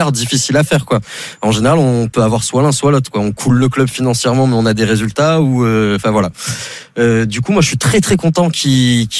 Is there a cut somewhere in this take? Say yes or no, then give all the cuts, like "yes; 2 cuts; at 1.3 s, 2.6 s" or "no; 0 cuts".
no; 0 cuts